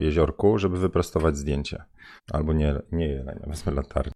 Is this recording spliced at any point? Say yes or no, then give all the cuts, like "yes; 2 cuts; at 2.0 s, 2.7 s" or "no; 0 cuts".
yes; 1 cut; at 2.2 s